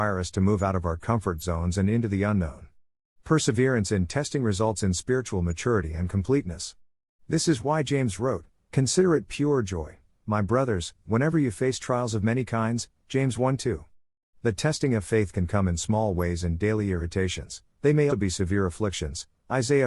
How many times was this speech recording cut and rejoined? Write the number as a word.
one